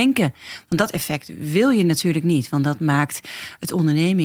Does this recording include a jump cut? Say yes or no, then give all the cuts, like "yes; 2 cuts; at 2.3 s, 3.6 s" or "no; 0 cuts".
no; 0 cuts